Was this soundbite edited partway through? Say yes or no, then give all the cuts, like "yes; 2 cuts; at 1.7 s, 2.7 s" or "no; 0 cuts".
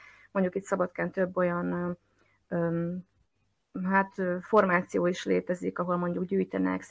no; 0 cuts